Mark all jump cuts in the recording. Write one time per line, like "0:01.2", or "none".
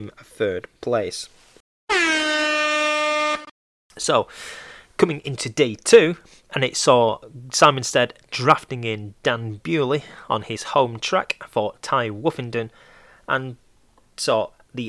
none